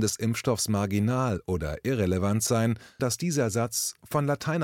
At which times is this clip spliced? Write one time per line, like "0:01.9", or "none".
0:03.0